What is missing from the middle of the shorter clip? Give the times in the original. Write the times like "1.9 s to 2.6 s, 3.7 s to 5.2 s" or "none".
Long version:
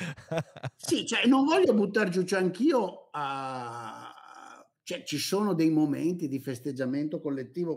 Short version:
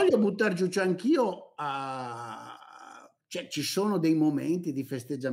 none